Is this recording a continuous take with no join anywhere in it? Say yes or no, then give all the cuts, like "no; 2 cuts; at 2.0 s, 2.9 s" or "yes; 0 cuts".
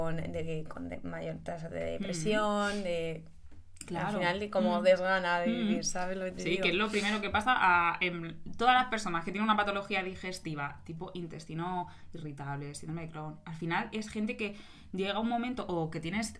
yes; 0 cuts